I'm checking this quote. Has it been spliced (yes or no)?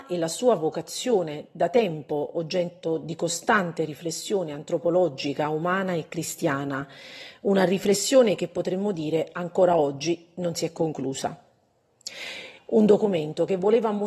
yes